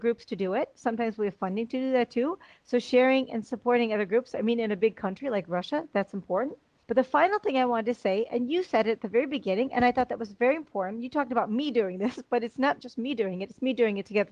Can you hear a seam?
no; 0 cuts

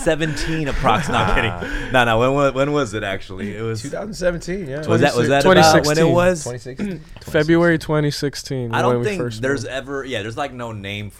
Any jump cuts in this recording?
no; 0 cuts

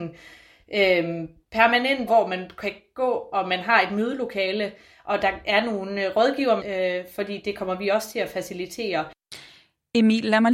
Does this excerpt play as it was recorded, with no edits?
no; 2 cuts; at 2.1 s, 6.6 s

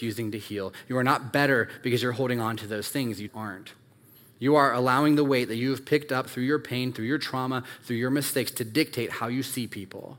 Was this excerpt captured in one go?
no; 1 cut; at 3.3 s

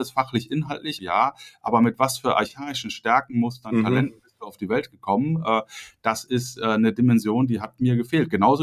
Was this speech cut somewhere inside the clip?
yes; 1 cut; at 1.0 s

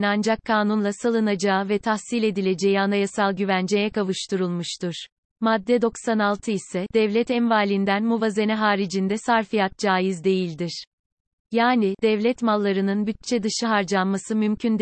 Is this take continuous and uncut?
yes; 0 cuts

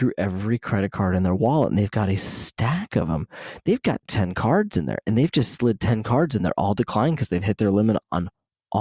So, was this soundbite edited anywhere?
no; 0 cuts

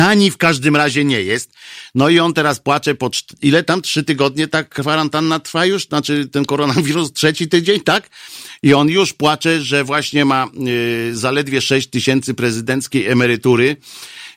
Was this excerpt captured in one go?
yes; 0 cuts

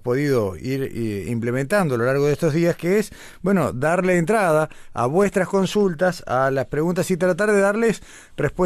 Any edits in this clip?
no; 0 cuts

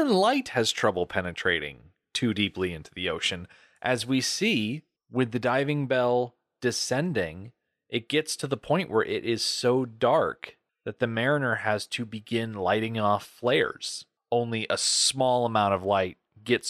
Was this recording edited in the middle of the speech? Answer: yes; 1 cut; at 14.2 s

